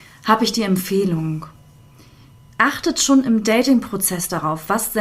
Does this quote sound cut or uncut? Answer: uncut